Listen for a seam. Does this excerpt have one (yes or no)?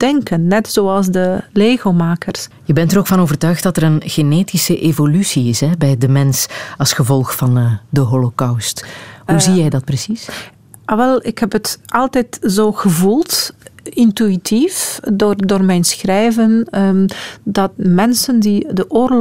yes